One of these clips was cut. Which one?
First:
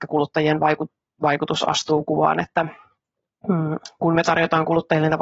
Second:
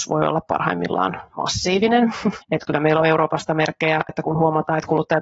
second; 2 cuts; at 2.4 s, 4.1 s

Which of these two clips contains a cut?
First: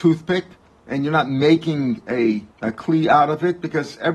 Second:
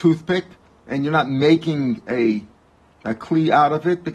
first; 1 cut; at 2.5 s

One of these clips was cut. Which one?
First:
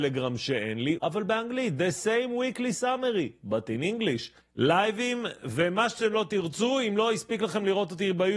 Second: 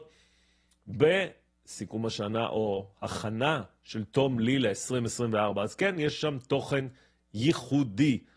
first; 2 cuts; at 1.0 s, 4.4 s

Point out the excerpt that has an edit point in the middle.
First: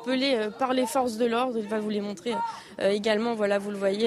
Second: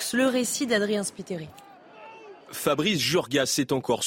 second; 1 cut; at 2.4 s

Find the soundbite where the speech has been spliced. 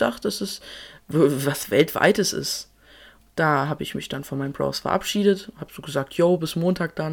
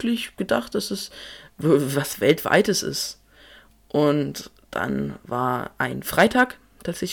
first; 1 cut; at 3.3 s

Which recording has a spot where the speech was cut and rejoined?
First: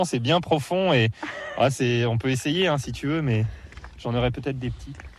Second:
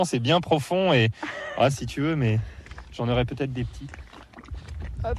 second; 1 cut; at 1.7 s

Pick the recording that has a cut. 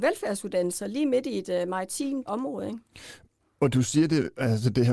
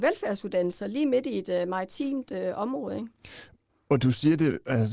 first; 1 cut; at 2.3 s

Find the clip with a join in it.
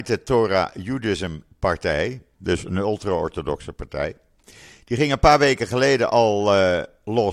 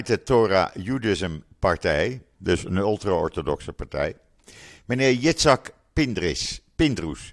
first; 1 cut; at 4.7 s

